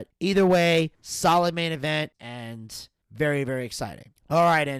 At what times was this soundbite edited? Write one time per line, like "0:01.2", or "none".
0:02.1